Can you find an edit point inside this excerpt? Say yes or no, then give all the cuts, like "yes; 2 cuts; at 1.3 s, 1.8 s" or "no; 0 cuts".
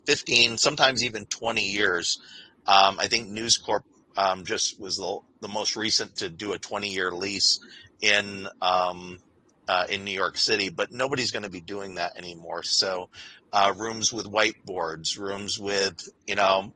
yes; 1 cut; at 12.6 s